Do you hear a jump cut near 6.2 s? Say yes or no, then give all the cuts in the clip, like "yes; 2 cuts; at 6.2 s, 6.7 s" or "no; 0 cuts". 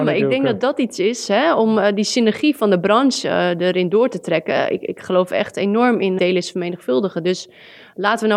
yes; 1 cut; at 6.2 s